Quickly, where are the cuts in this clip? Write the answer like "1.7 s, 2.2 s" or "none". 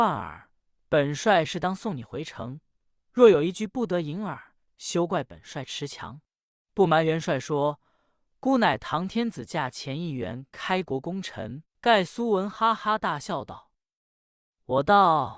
6.6 s, 11.6 s